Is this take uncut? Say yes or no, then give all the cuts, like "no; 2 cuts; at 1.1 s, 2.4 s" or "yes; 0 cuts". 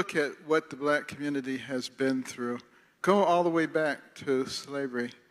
no; 1 cut; at 3.0 s